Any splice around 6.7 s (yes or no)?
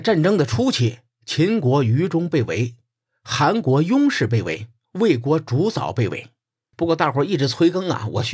yes